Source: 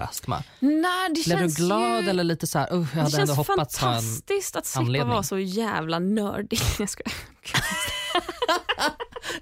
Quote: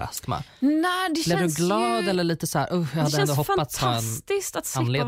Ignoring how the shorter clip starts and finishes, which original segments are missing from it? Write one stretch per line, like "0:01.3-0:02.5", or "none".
none